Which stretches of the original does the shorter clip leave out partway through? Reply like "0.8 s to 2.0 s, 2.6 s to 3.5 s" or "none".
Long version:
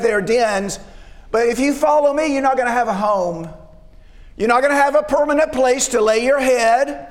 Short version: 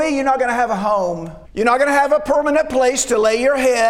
3.6 s to 4.3 s